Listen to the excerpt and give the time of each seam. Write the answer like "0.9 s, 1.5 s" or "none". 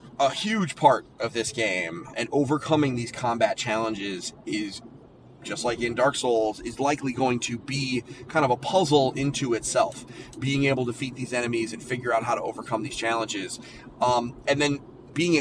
2.1 s